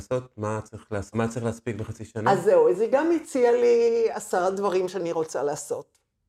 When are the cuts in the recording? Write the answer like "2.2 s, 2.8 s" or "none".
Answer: 1.1 s

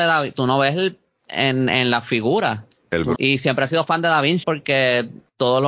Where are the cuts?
3.1 s, 4.4 s

